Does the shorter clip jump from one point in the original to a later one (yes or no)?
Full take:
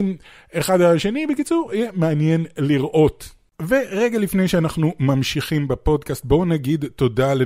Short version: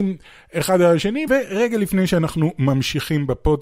yes